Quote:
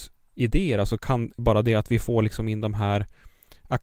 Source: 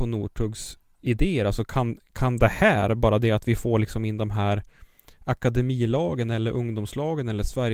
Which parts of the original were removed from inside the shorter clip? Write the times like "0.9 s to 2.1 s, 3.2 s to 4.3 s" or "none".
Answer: 2.1 s to 3.0 s